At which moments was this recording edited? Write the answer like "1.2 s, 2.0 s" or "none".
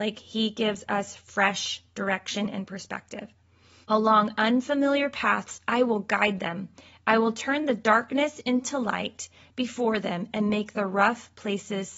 3.8 s